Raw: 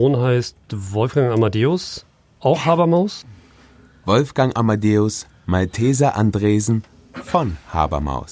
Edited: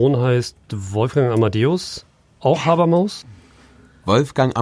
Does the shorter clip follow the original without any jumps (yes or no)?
yes